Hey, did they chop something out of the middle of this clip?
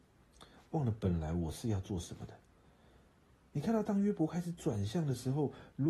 no; 0 cuts

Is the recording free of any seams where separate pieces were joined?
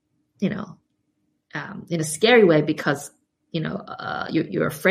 yes; 0 cuts

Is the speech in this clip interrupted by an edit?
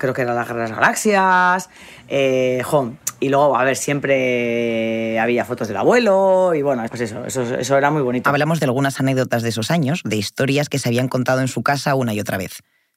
yes; 1 cut; at 6.9 s

